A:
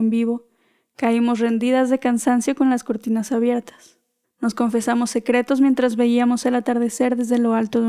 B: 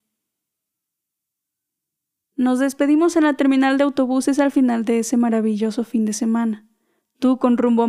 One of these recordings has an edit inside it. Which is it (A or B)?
A